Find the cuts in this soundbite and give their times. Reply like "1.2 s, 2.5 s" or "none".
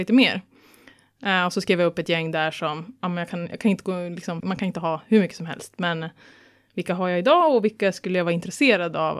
4.4 s